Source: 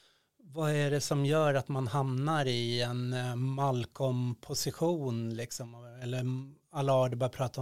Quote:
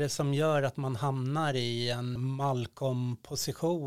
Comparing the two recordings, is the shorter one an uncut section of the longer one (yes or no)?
no